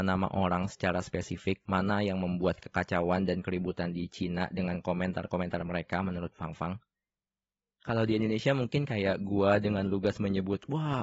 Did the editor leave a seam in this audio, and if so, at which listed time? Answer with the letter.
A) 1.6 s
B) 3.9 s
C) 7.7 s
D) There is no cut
A